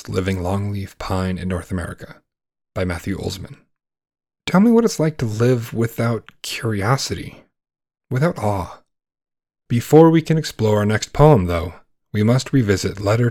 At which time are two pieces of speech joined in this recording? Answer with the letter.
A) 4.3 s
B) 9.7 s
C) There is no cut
B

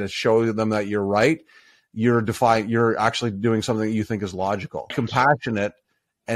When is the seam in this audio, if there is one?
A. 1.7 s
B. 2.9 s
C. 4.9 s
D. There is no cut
C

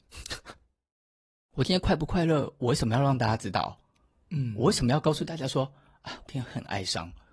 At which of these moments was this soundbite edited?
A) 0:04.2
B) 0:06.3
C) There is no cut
B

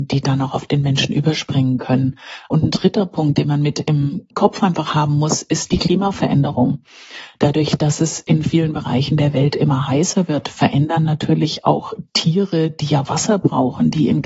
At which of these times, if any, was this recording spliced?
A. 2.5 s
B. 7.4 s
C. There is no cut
C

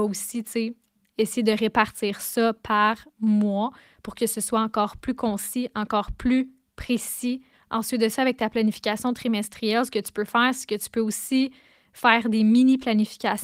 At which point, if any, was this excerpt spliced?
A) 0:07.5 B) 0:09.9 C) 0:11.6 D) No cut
A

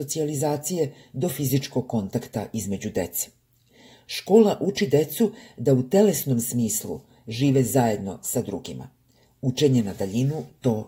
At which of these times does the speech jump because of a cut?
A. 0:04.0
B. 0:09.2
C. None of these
C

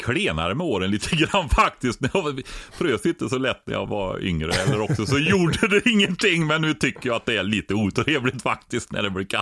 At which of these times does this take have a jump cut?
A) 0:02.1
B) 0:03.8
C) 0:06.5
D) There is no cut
B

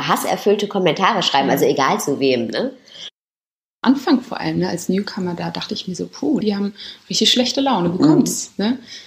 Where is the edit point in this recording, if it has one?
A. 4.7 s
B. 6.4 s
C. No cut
B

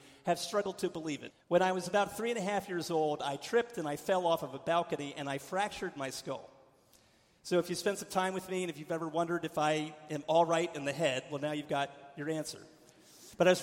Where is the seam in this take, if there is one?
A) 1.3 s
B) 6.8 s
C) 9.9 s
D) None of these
A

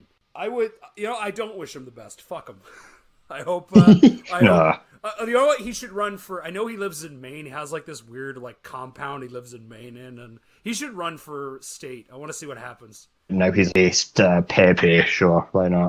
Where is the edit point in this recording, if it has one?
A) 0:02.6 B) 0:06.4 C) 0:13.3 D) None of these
C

